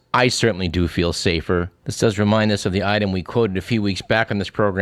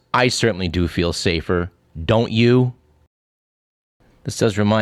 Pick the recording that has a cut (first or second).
first